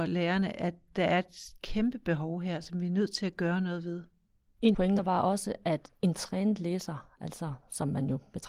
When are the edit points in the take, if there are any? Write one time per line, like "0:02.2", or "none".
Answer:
none